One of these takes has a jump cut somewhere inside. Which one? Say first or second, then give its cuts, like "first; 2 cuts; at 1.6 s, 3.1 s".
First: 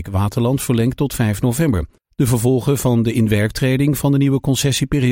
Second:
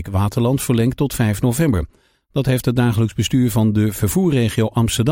first; 1 cut; at 2.0 s